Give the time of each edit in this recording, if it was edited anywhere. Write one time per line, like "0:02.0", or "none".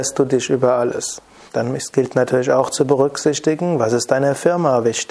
0:01.5